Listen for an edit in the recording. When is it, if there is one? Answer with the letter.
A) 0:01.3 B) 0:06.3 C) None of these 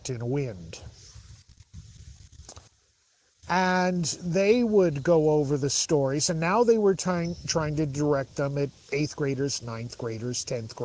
C